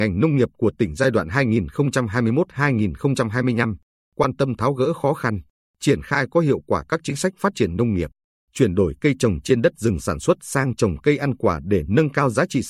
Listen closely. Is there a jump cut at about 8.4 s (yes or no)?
yes